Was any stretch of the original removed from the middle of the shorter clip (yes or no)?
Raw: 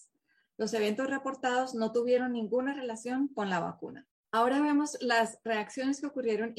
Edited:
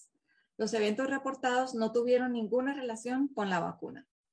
no